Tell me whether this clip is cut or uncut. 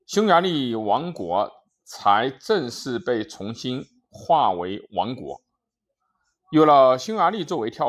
uncut